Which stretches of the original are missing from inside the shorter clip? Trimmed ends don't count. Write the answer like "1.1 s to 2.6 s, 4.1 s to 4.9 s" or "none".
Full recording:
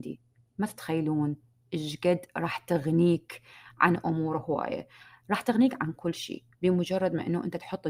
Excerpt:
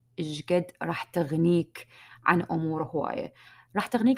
none